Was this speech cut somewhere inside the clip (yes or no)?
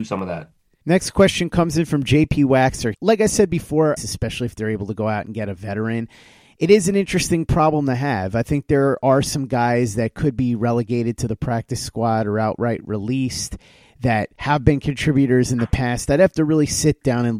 yes